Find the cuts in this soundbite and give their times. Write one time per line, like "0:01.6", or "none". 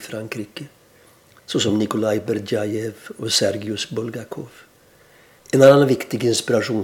0:05.4